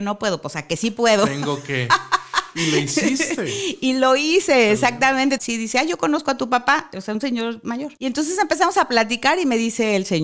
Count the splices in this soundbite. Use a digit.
2